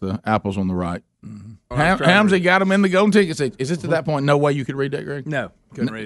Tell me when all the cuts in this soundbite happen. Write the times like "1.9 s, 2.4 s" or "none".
1.7 s